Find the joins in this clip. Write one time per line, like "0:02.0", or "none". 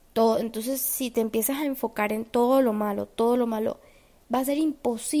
0:03.1